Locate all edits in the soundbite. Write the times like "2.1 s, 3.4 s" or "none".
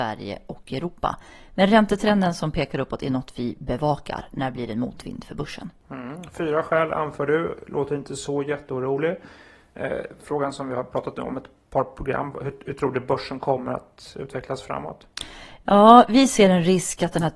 none